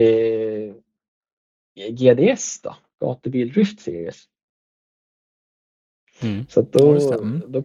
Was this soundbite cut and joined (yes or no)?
no